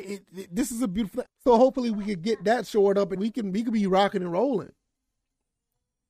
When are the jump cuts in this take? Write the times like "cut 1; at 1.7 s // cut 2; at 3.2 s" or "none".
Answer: cut 1; at 1.3 s // cut 2; at 3.2 s